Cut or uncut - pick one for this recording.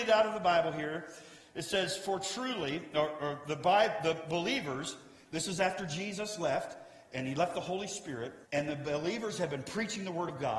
cut